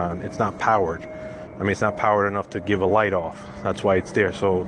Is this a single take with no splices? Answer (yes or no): yes